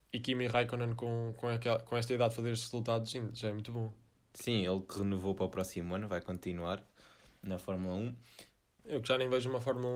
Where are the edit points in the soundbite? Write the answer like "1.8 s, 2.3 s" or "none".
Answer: 8.8 s